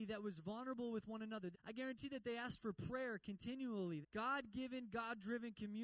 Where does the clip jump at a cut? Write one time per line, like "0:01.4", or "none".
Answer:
0:01.5
0:04.0